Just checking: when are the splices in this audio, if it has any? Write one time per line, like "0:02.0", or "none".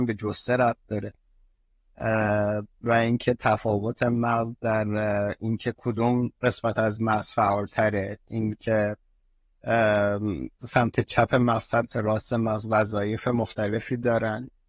0:10.6